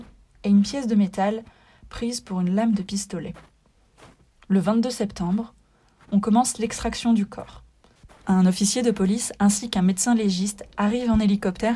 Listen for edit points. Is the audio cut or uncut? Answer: uncut